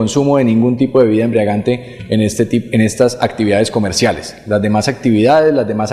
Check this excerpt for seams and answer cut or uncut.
uncut